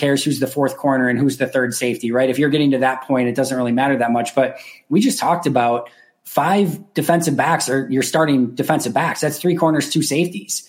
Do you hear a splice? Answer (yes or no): no